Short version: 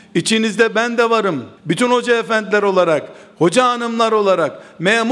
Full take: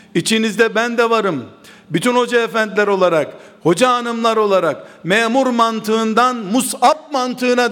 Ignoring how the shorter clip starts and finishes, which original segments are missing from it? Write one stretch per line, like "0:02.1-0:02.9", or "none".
0:01.6-0:01.8